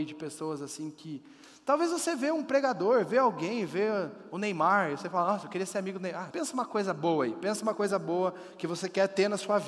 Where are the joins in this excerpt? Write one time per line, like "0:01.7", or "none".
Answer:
0:06.3